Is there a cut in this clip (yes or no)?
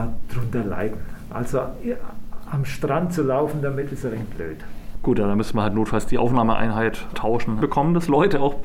yes